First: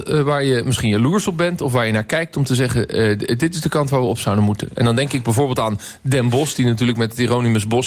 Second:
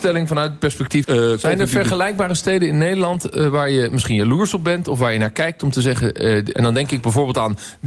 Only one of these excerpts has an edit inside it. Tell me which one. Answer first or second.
second